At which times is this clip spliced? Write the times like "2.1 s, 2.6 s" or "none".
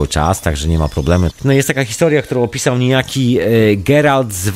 1.3 s

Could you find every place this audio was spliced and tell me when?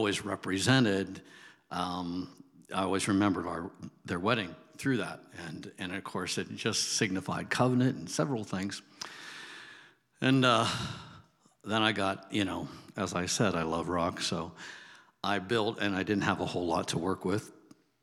none

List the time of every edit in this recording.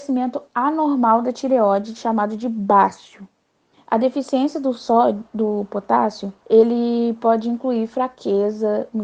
3.7 s, 6.4 s

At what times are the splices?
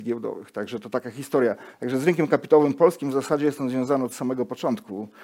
none

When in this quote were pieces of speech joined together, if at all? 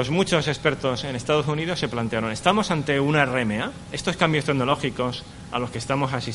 none

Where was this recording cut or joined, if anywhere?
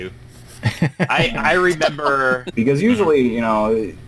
2.5 s

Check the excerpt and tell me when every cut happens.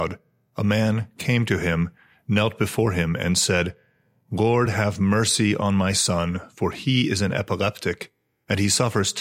none

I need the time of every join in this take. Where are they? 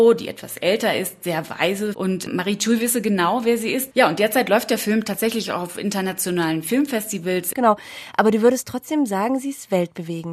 1.9 s, 3.9 s, 7.5 s

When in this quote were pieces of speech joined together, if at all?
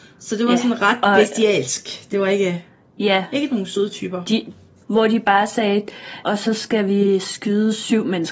4.8 s, 6.2 s

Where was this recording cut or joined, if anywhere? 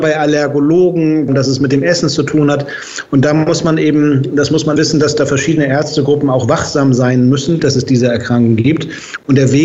1.3 s, 4.8 s, 7.6 s

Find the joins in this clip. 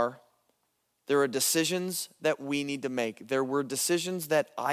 none

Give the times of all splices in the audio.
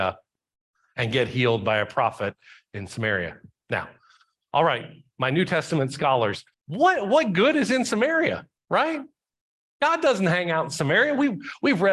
6.5 s, 8.6 s

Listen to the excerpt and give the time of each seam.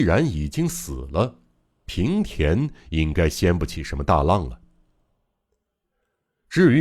none

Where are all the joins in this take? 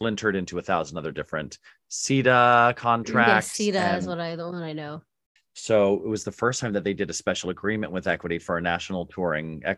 5.4 s

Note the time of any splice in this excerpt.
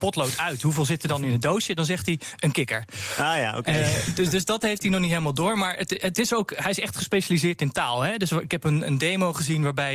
none

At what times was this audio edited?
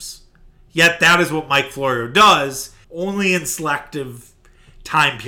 2.8 s

